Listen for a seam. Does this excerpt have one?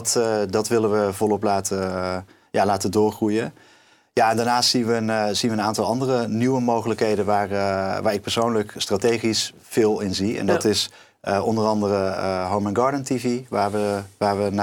no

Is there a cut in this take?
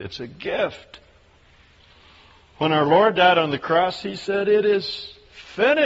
no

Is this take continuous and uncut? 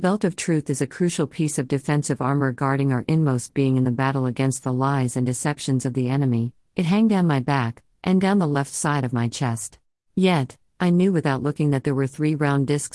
no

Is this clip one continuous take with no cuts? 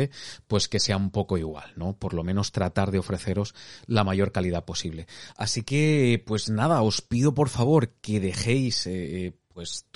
yes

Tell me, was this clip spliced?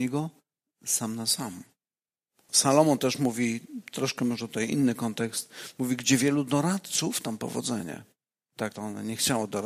yes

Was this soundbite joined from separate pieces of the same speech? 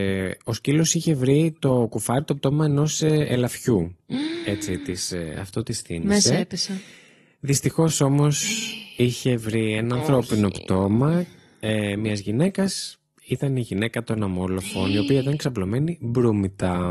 no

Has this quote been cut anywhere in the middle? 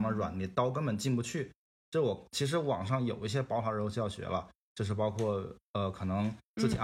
yes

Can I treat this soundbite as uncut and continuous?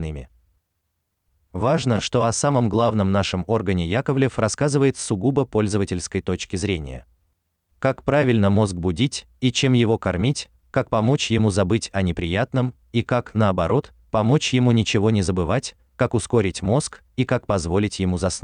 yes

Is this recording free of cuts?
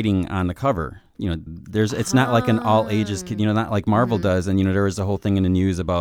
no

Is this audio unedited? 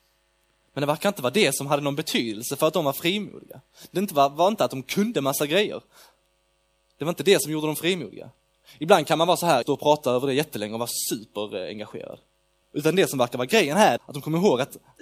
no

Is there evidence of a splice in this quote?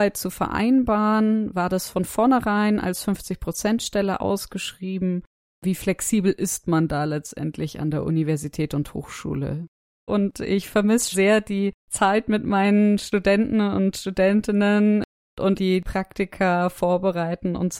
yes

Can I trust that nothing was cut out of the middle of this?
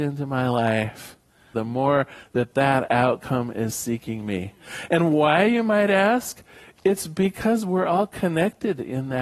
no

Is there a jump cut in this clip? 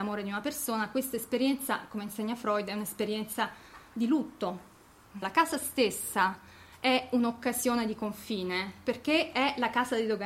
yes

